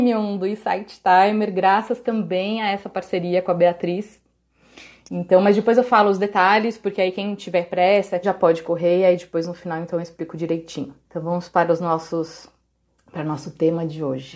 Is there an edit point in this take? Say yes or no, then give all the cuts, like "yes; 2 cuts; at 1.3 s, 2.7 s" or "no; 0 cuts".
yes; 2 cuts; at 8.2 s, 11.0 s